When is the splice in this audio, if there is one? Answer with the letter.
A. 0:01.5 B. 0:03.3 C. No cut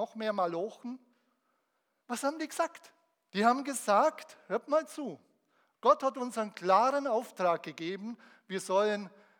B